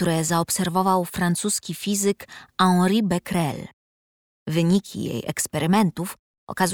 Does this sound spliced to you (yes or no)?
no